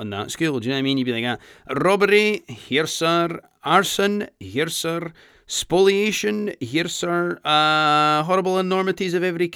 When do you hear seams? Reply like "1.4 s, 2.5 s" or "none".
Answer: 1.7 s